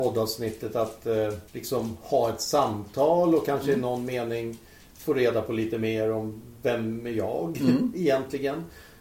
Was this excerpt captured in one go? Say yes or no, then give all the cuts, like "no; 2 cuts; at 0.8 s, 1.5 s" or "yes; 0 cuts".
no; 1 cut; at 1.5 s